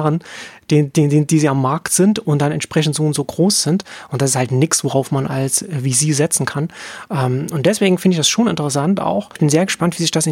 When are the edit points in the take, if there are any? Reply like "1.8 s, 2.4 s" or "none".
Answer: none